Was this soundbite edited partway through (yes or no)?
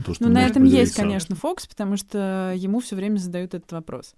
no